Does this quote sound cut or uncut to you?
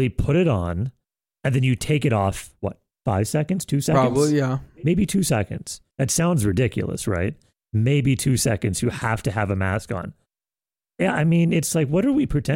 cut